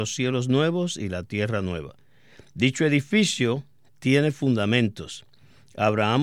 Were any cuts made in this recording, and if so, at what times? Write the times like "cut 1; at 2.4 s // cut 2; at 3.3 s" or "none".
none